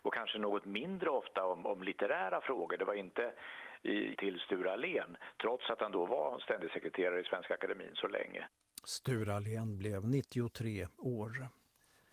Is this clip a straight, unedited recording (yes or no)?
no